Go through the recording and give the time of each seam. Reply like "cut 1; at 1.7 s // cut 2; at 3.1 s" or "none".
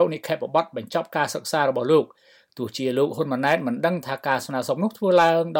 none